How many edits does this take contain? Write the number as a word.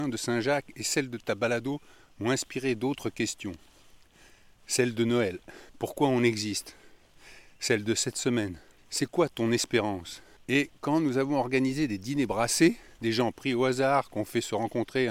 one